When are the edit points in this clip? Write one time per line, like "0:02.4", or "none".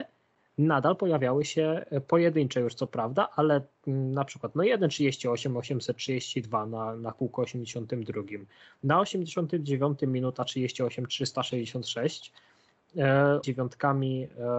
0:13.4

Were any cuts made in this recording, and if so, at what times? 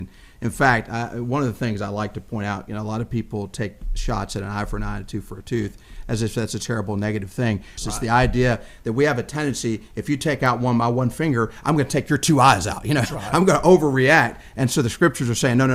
0:07.8

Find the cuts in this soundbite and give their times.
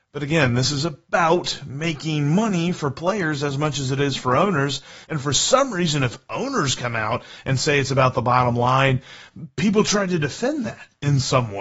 0:05.0

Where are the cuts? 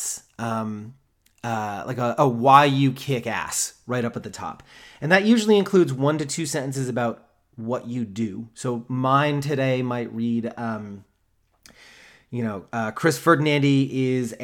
none

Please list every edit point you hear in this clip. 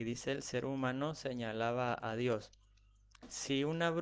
none

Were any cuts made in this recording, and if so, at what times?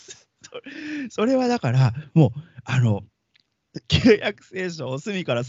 none

